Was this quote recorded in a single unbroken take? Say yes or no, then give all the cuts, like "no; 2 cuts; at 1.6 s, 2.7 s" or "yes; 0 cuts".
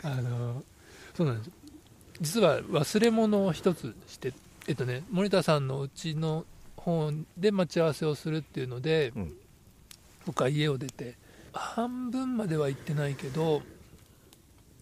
yes; 0 cuts